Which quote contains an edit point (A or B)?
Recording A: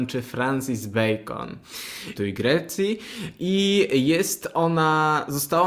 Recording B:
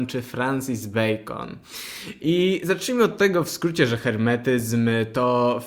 A